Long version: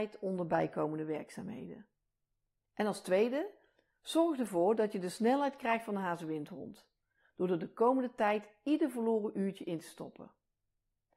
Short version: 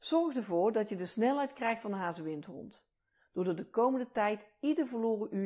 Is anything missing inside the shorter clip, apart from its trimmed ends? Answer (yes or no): no